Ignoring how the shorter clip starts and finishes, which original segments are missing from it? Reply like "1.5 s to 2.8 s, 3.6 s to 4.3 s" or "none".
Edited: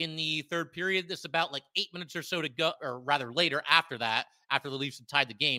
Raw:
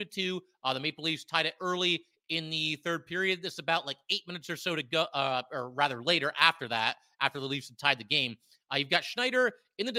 5.1 s to 5.5 s